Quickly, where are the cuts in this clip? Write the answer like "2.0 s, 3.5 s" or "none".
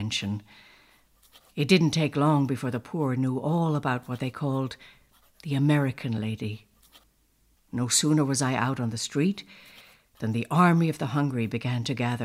7.5 s